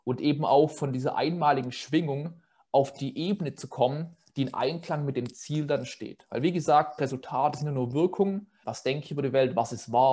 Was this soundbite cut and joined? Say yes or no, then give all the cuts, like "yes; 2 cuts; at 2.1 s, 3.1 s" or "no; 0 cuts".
yes; 2 cuts; at 7.0 s, 8.6 s